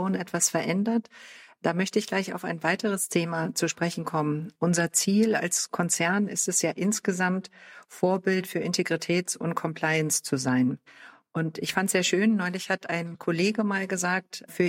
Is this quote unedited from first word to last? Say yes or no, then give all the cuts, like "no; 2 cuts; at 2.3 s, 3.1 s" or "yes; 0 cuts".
yes; 0 cuts